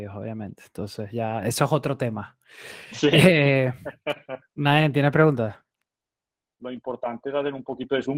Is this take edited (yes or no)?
yes